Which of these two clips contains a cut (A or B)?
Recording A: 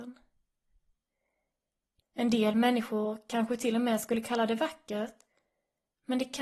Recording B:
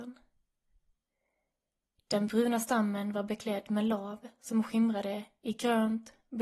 A